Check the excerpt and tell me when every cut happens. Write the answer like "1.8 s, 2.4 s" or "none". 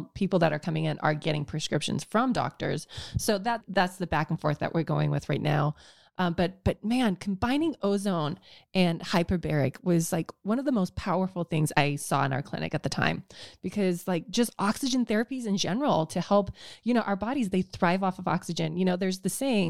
none